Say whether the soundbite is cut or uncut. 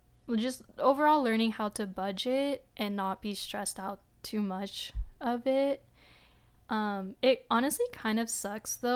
cut